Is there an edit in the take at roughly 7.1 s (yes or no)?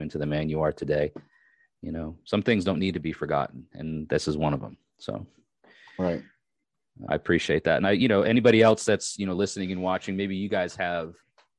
yes